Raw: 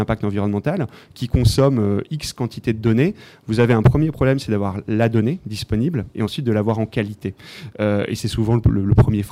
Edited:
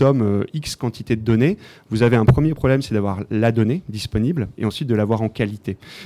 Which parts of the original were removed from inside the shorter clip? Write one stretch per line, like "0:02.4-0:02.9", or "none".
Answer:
none